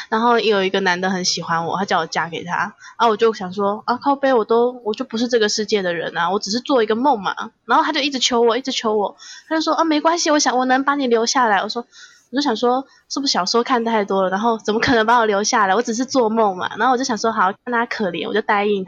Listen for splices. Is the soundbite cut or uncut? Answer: uncut